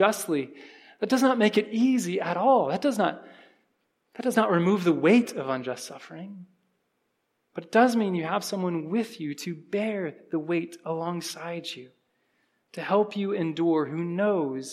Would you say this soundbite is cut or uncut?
uncut